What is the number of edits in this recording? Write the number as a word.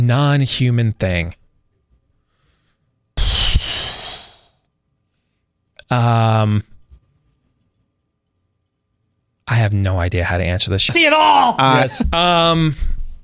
two